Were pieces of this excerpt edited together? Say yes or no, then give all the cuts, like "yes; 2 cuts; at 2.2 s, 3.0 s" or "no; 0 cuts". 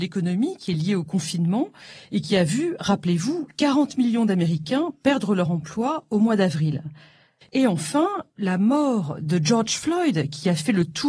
yes; 1 cut; at 7.4 s